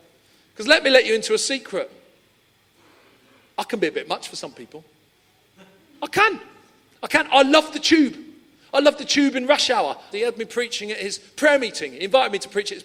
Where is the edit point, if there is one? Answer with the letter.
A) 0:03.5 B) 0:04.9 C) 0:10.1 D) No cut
C